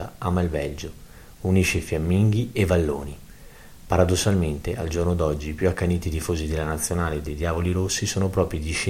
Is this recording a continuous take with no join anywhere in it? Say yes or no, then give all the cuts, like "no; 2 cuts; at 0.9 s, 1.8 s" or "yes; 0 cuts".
yes; 0 cuts